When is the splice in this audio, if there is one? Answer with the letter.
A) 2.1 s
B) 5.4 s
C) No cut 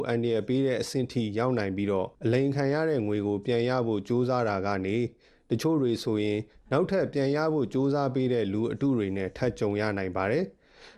A